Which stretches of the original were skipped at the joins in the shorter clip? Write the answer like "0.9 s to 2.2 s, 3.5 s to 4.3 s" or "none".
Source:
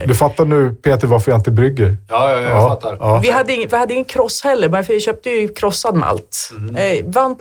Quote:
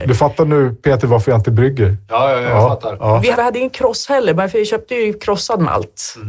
3.3 s to 3.7 s